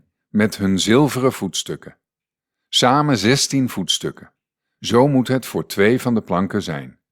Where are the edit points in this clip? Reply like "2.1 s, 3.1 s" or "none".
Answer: 4.6 s